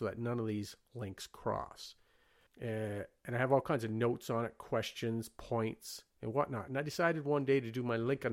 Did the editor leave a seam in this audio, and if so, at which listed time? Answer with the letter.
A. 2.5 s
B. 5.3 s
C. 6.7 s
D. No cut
A